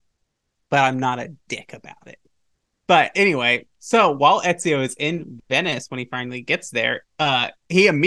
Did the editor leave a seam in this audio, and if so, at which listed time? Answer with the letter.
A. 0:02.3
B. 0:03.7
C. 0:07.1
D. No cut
D